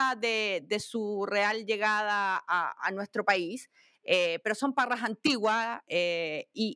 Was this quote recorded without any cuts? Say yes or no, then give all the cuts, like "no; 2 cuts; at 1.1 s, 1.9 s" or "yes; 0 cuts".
yes; 0 cuts